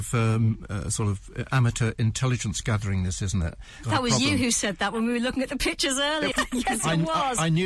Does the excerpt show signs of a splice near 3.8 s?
yes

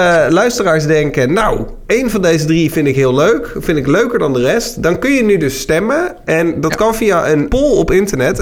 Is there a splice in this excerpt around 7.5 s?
yes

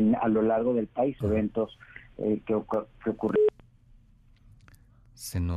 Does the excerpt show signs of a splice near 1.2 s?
yes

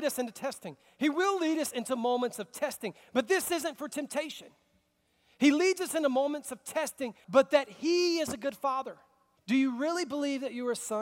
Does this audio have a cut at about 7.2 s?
yes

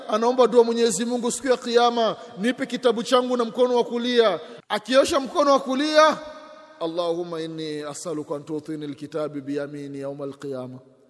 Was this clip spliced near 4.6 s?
yes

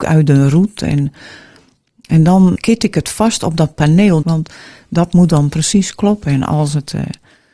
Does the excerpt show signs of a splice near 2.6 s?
yes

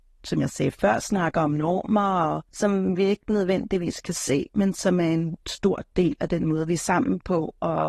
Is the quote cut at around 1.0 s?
no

